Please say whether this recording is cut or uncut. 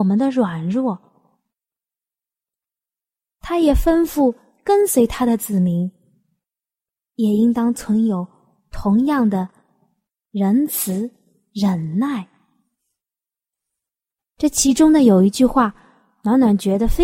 uncut